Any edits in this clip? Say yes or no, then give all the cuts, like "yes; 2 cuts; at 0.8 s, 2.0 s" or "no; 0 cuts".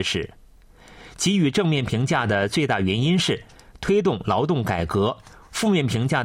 no; 0 cuts